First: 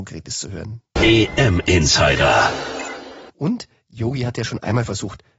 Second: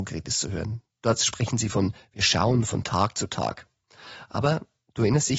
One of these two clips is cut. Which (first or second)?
first